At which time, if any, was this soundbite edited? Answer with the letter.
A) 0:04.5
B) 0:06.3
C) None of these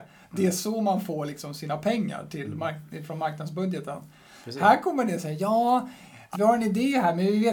B